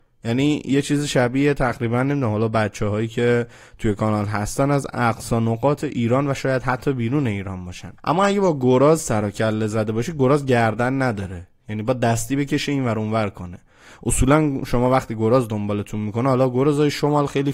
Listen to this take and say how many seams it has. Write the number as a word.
one